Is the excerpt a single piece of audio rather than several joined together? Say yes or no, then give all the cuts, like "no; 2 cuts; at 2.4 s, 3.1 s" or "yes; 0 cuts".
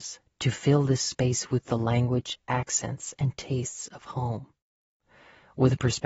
yes; 0 cuts